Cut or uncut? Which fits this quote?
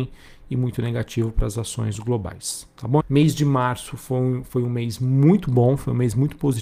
cut